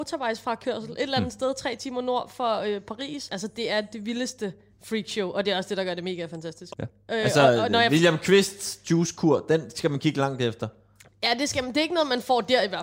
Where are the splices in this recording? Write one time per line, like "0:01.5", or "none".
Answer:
0:03.3
0:06.7